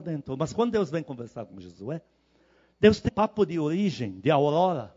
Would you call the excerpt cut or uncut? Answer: cut